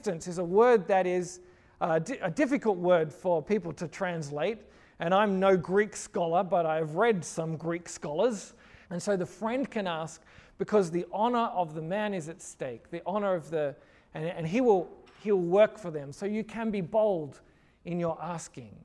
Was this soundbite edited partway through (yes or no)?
yes